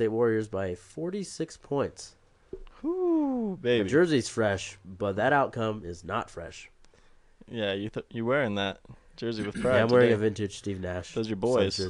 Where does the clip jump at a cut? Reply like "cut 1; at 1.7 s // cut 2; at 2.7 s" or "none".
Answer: none